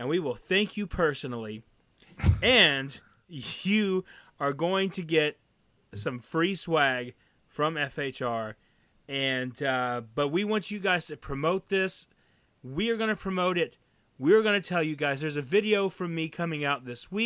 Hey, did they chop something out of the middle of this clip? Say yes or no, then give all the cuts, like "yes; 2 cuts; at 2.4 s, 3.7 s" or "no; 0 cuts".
no; 0 cuts